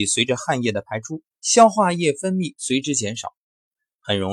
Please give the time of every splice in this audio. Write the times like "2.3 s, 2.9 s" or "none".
1.3 s